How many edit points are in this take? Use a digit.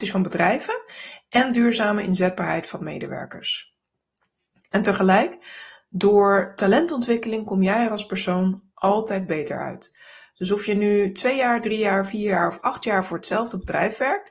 0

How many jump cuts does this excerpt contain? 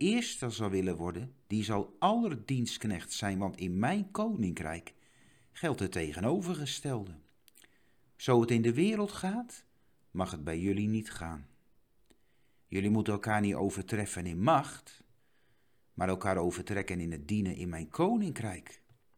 1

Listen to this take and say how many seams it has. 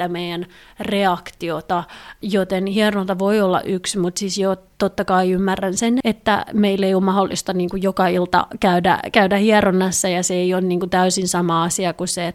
1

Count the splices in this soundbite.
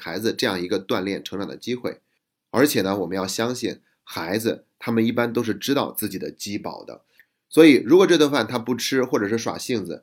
0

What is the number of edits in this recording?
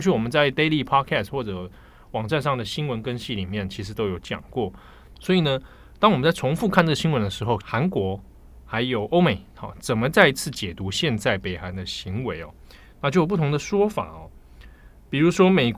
2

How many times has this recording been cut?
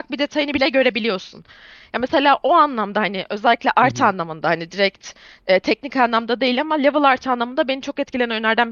0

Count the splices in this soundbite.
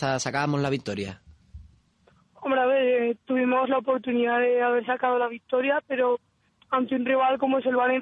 0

